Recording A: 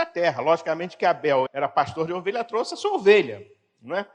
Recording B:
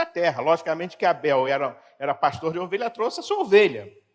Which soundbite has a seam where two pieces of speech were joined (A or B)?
A